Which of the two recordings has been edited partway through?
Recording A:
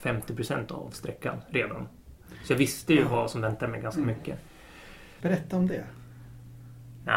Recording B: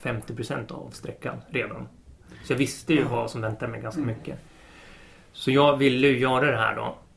A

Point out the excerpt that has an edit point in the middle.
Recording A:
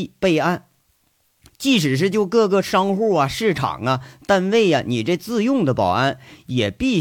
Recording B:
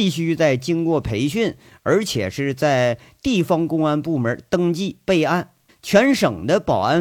B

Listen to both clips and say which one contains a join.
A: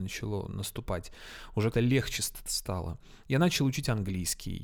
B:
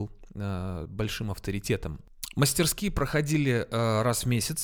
A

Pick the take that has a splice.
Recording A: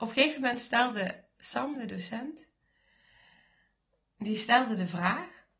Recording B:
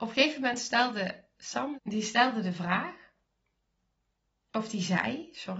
B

